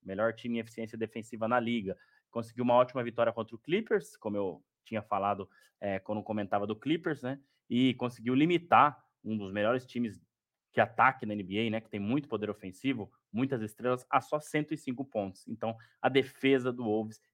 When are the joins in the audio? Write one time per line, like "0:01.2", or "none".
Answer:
none